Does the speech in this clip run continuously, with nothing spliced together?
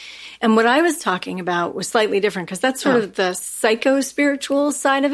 yes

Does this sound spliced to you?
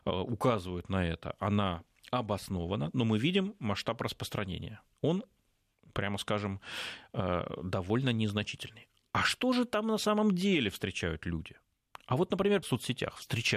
yes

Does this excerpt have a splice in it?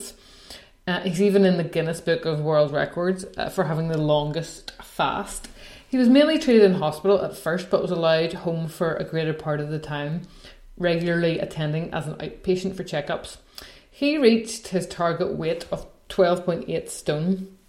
no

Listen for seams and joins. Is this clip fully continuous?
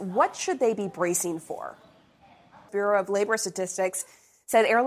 no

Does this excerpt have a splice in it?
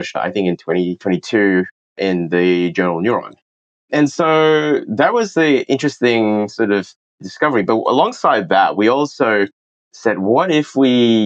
no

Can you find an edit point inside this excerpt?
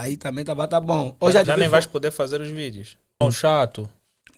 yes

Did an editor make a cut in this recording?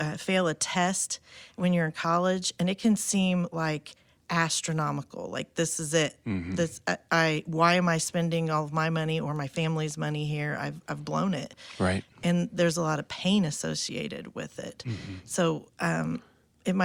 no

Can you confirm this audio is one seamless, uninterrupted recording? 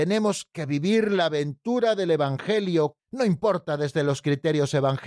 no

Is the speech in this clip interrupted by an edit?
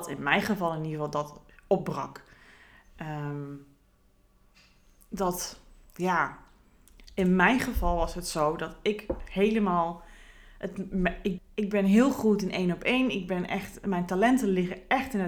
yes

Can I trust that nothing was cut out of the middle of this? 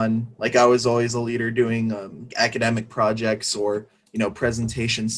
no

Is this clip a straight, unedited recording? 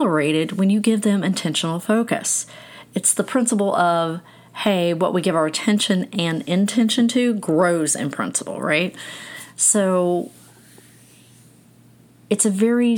yes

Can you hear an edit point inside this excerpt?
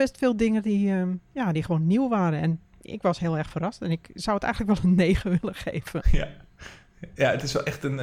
no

